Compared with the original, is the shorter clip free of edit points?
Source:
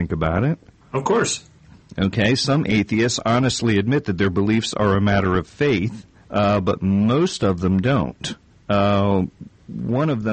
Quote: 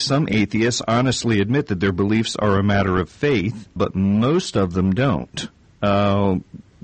no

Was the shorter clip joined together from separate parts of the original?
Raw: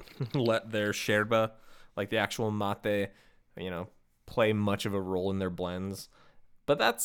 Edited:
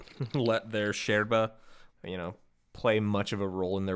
yes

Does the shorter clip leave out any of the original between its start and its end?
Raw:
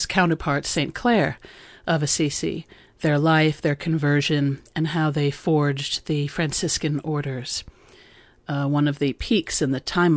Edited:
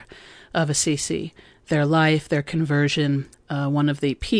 yes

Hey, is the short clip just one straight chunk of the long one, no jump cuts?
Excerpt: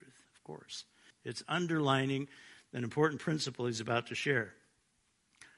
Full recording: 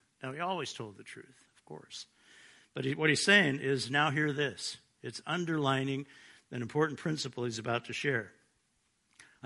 no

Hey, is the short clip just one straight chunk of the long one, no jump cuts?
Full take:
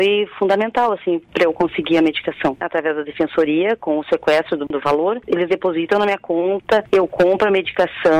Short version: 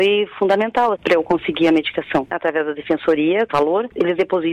no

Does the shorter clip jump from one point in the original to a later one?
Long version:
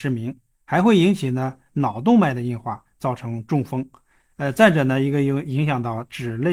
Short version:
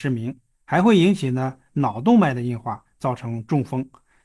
no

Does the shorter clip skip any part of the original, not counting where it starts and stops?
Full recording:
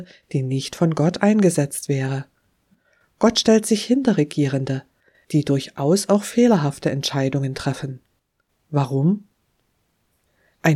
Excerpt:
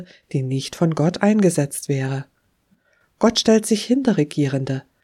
no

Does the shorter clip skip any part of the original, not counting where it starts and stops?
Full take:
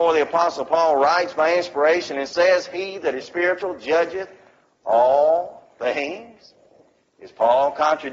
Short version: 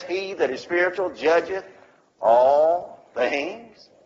no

